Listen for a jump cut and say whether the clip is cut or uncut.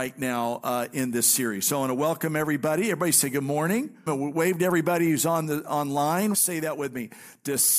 cut